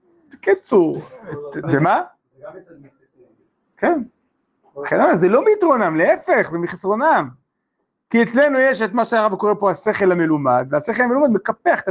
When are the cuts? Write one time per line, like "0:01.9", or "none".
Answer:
0:01.6